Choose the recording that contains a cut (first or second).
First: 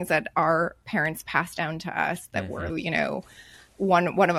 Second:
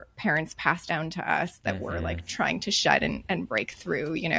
first